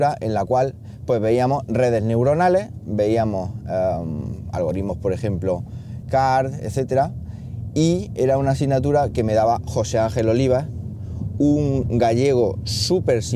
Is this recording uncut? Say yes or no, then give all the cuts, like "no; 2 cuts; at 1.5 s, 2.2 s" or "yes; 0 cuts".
no; 1 cut; at 6.0 s